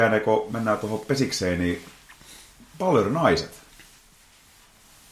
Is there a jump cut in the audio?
no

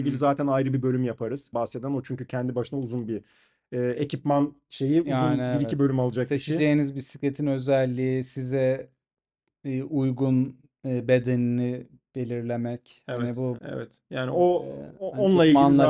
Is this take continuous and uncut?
no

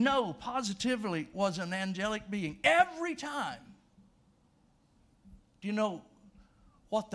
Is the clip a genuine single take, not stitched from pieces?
yes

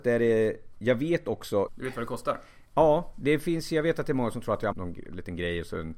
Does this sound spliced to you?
yes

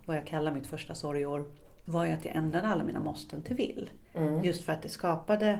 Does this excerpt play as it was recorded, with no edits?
no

